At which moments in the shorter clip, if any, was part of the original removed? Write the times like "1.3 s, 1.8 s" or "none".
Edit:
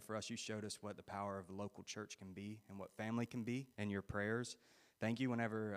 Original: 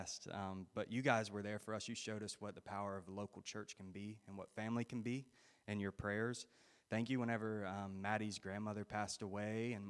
3.7 s